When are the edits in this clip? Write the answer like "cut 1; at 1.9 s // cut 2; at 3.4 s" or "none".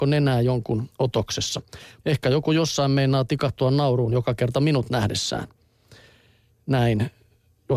cut 1; at 2.0 s